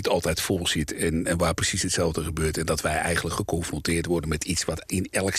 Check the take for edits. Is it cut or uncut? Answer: cut